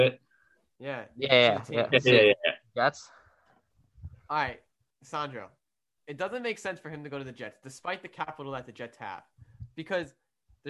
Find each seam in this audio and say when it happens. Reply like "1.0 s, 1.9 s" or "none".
none